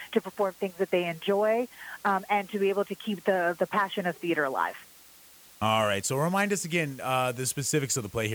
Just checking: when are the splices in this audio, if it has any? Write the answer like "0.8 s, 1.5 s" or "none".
none